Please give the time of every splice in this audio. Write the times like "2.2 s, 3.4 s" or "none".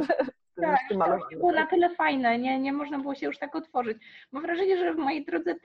none